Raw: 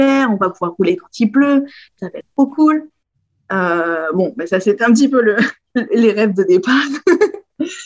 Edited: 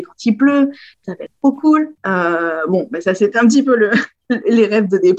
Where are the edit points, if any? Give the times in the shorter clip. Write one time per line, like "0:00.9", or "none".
0:02.0